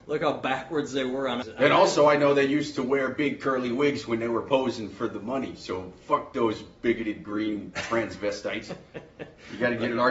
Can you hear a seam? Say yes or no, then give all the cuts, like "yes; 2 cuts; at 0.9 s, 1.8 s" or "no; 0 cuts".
yes; 1 cut; at 1.4 s